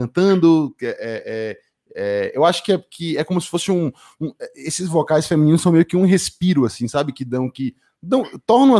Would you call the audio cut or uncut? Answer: uncut